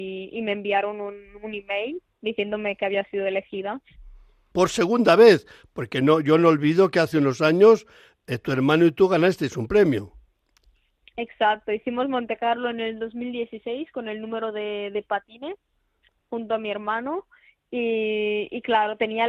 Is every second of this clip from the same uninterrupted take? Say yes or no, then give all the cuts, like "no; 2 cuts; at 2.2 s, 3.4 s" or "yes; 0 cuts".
no; 1 cut; at 4.5 s